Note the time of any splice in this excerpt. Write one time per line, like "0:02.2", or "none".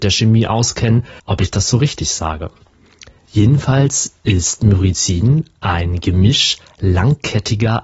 0:01.2